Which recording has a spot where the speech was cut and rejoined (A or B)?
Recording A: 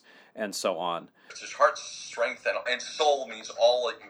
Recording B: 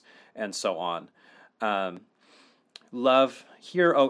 A